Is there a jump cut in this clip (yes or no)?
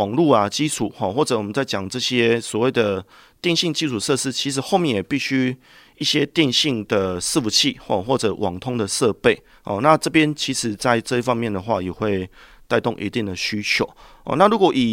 no